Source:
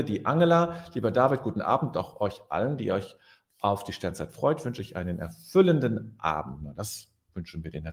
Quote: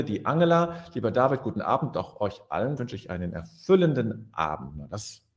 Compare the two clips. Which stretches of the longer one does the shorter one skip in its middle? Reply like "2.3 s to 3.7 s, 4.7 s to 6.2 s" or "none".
2.8 s to 4.6 s